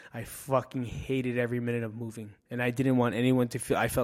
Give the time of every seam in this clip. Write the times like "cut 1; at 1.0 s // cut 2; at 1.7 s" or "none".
cut 1; at 2.4 s